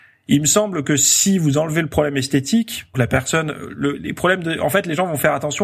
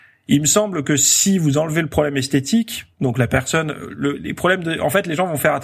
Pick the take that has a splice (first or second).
first